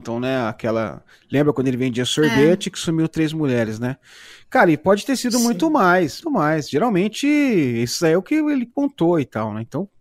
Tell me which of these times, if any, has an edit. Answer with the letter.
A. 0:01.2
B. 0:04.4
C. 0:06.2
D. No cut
C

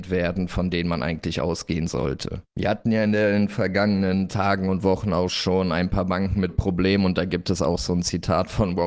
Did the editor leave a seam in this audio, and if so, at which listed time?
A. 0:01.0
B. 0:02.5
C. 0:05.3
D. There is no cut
B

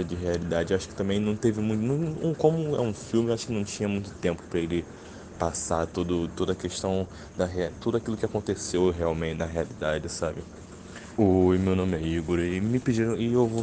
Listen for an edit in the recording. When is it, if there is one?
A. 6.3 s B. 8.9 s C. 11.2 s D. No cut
C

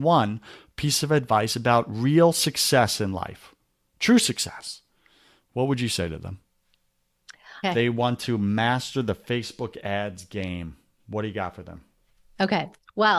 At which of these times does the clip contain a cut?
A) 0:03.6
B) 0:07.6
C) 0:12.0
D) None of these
B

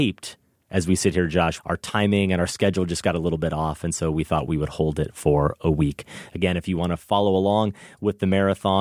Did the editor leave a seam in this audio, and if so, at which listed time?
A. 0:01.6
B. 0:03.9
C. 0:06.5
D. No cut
A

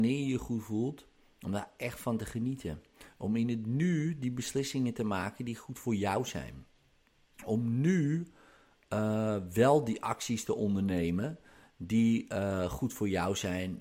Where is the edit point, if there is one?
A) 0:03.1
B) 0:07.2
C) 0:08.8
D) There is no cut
D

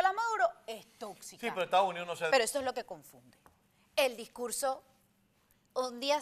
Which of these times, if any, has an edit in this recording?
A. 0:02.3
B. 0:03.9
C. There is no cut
A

